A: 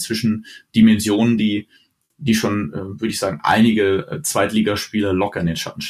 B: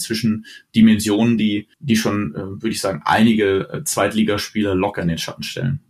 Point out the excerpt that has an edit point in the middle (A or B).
B